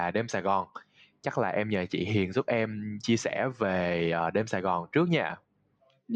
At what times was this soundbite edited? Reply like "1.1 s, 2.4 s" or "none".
none